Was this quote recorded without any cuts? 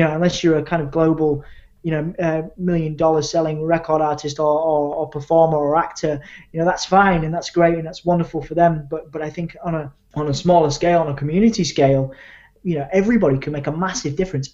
yes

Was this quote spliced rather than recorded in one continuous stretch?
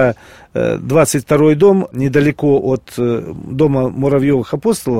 no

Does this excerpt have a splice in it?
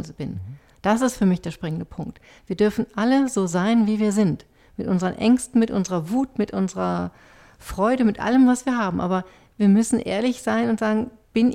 no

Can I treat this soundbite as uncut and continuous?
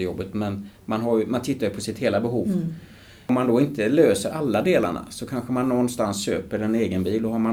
yes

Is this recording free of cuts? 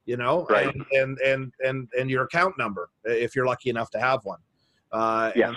yes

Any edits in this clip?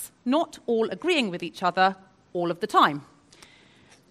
no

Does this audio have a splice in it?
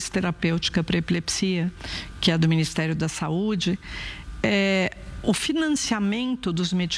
yes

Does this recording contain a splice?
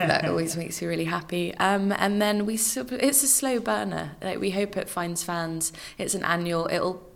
no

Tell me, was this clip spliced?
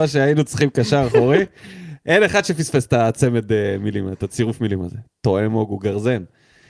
no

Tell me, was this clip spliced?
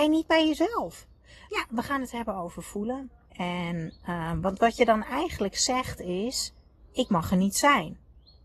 yes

